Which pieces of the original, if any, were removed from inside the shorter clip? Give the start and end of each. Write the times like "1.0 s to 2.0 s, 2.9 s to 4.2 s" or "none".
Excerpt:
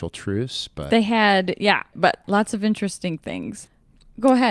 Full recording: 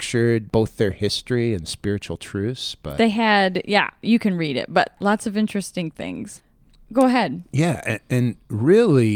4.0 s to 4.7 s